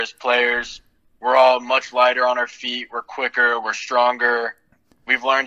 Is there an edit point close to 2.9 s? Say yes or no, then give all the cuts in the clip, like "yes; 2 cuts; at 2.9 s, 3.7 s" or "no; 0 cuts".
no; 0 cuts